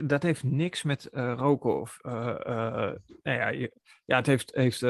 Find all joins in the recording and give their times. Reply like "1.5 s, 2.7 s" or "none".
none